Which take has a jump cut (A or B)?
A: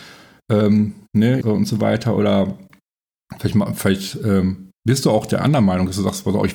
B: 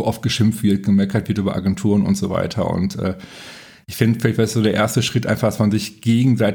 A